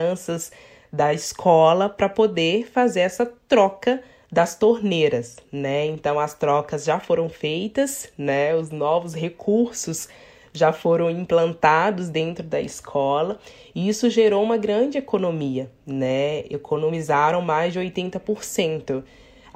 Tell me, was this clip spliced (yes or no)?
no